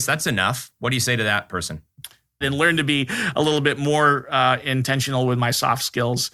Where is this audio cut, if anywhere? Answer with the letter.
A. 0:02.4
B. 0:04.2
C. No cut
A